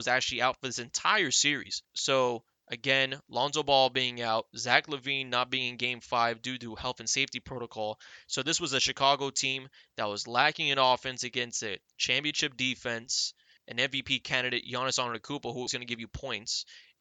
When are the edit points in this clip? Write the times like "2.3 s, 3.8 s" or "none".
1.8 s, 13.6 s, 15.7 s